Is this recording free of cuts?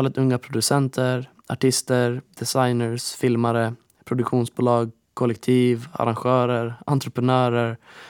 yes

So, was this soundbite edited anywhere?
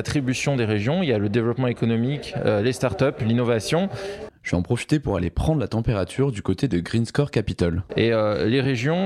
yes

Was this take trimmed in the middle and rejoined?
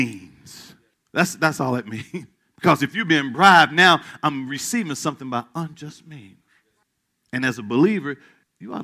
no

